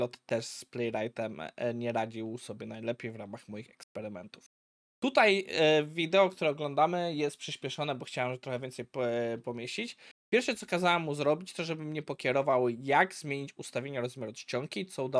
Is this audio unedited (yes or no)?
yes